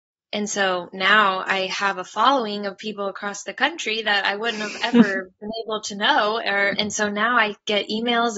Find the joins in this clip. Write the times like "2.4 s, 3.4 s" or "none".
6.8 s